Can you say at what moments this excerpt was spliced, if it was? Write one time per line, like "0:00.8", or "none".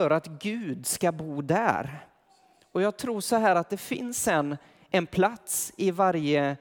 none